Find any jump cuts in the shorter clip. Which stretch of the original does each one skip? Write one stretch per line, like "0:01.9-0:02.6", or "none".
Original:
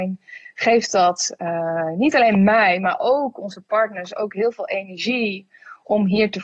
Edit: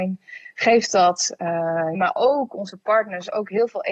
0:01.9-0:02.8